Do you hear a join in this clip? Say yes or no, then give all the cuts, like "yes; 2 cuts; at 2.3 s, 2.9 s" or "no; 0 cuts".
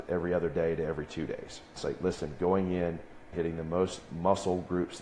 yes; 2 cuts; at 1.8 s, 3.3 s